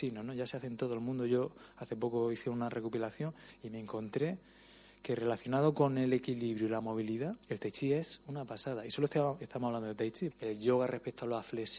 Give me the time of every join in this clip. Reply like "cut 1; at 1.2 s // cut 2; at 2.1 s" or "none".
cut 1; at 7.4 s // cut 2; at 10.3 s